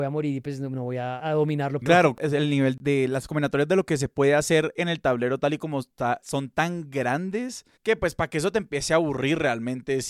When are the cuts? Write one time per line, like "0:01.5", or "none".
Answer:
0:01.8